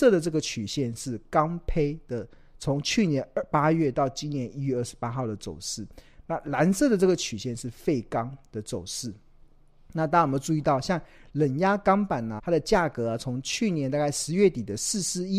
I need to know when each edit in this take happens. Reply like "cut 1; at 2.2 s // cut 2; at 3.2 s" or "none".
cut 1; at 12.4 s